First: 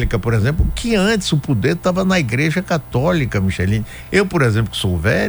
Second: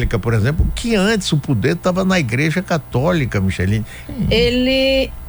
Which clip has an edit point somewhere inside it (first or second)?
second